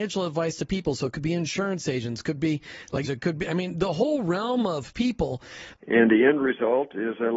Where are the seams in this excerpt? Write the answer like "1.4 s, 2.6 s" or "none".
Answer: 3.0 s, 5.7 s